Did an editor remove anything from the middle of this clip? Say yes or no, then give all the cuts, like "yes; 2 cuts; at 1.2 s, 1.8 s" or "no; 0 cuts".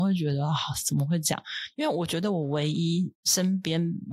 no; 0 cuts